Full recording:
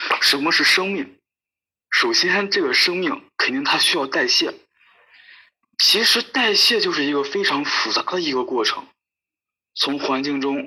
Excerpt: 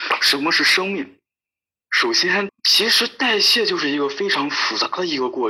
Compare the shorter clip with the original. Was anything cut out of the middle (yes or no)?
yes